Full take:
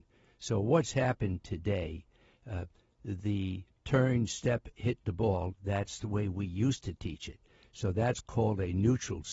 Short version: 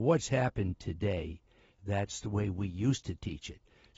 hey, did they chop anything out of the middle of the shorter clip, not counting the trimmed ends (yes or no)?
yes